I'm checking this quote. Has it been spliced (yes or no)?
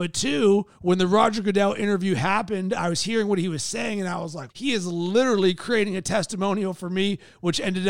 yes